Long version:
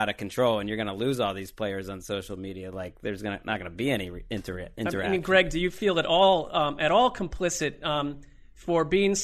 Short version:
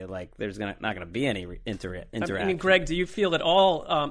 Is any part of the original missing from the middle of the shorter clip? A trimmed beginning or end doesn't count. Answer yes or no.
no